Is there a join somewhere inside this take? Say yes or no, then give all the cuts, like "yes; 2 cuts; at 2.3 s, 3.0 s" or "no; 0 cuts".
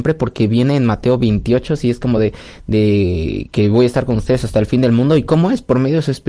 no; 0 cuts